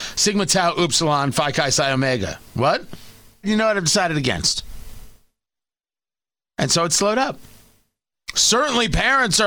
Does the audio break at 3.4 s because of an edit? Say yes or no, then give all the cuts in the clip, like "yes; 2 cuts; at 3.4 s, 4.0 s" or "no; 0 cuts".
yes; 1 cut; at 3.4 s